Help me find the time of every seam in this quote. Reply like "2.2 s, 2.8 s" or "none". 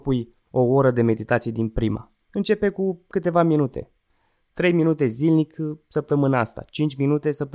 2.2 s